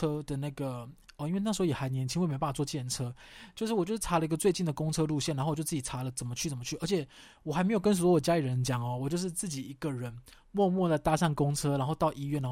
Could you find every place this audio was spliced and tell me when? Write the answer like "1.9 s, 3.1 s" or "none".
none